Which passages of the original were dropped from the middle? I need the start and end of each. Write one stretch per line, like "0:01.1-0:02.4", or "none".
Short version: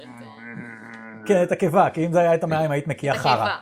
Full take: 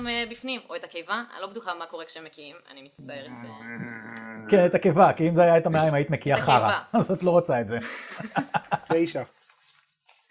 none